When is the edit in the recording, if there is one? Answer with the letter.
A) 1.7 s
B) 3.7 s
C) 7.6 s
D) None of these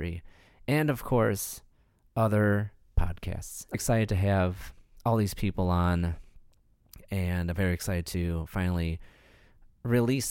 B